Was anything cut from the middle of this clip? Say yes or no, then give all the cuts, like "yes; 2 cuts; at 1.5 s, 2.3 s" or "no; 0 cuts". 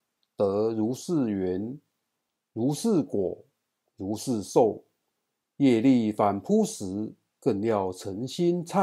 no; 0 cuts